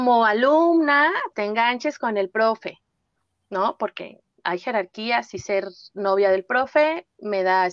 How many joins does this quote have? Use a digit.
1